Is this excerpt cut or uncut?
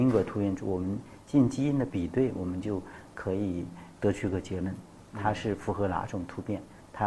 cut